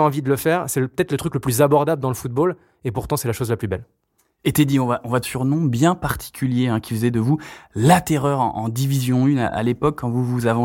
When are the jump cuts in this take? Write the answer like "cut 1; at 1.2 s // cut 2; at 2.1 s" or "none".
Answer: cut 1; at 5.2 s